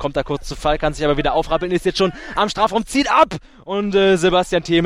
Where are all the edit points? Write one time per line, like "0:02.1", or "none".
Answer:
none